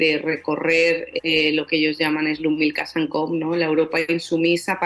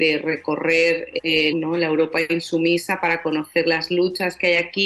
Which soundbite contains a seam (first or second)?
second